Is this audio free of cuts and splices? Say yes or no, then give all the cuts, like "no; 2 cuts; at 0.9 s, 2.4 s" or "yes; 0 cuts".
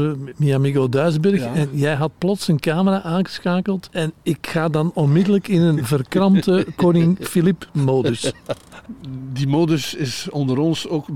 yes; 0 cuts